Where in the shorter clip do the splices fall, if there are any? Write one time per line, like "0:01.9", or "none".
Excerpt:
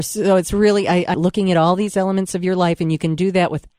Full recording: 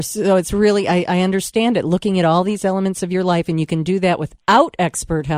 0:01.1